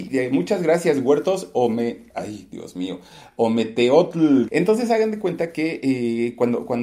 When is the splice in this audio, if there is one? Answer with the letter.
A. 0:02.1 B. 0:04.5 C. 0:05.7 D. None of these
B